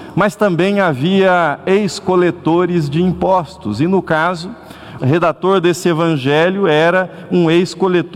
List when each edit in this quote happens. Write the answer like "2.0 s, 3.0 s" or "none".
5.0 s